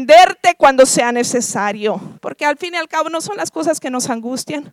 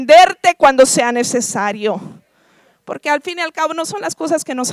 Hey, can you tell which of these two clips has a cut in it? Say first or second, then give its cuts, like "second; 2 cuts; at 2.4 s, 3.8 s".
first; 1 cut; at 2.2 s